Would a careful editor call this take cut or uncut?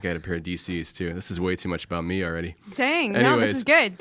uncut